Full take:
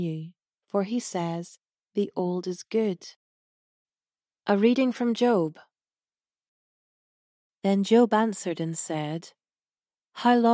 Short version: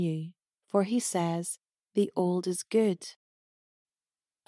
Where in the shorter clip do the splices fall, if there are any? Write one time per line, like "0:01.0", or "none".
none